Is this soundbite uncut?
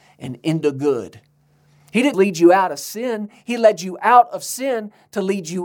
no; 1 cut; at 2.1 s

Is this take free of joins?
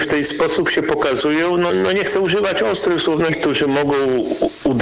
no; 2 cuts; at 1.7 s, 3.3 s

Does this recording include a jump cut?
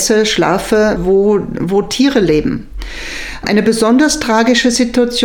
yes; 1 cut; at 1.0 s

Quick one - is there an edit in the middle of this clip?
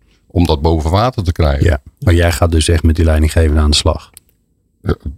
no; 0 cuts

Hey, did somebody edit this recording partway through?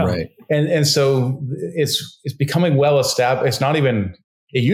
no; 0 cuts

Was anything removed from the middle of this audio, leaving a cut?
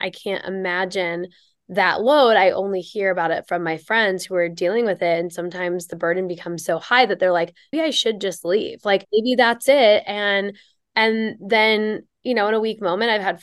yes; 2 cuts; at 7.7 s, 9.0 s

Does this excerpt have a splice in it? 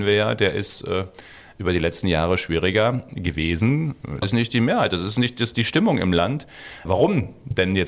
yes; 2 cuts; at 4.2 s, 6.9 s

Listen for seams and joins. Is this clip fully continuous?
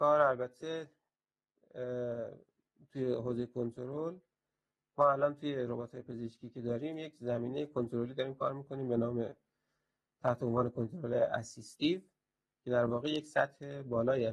yes; 0 cuts

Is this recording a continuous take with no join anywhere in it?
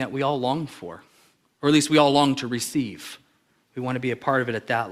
yes; 0 cuts

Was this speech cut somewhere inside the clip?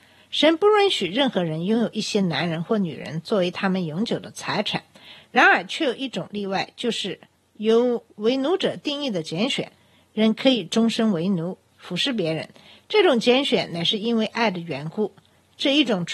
no; 0 cuts

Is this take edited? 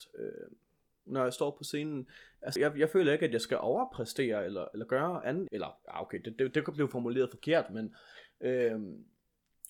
yes; 2 cuts; at 2.6 s, 5.5 s

